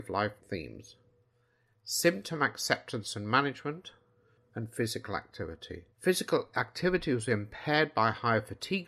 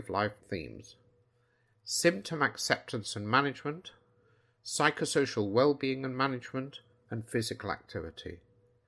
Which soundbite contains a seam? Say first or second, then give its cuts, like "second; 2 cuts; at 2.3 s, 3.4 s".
first; 2 cuts; at 4.4 s, 5.9 s